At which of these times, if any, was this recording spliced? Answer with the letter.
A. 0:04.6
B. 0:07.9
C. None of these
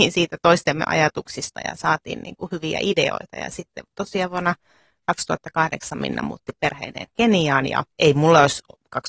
B